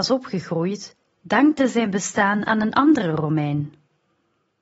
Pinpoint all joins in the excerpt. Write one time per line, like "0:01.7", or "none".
none